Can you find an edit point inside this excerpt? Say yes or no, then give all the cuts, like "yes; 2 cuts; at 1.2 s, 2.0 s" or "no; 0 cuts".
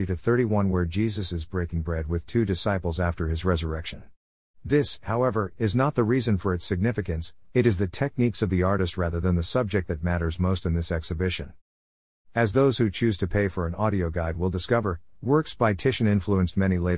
no; 0 cuts